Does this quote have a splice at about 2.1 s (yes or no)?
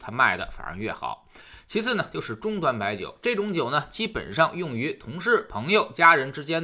no